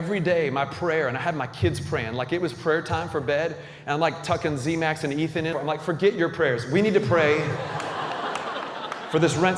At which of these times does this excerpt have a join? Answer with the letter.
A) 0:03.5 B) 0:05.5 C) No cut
B